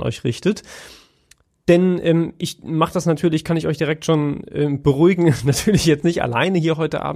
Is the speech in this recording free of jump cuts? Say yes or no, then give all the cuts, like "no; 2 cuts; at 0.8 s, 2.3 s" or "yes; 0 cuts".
yes; 0 cuts